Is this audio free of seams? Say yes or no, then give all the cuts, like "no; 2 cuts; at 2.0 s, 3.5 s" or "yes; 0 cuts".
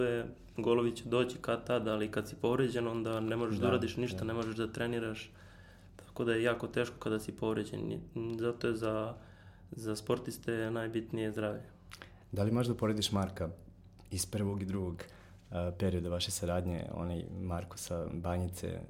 yes; 0 cuts